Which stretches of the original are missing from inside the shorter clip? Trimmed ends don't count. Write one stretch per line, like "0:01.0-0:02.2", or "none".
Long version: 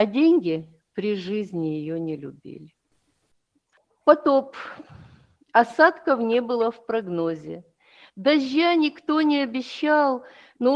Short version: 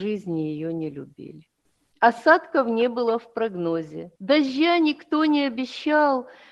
0:03.2-0:05.4
0:07.7-0:08.1